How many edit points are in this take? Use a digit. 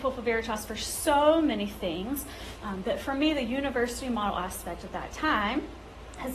1